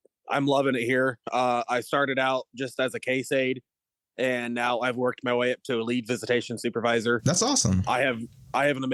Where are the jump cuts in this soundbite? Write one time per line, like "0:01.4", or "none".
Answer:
none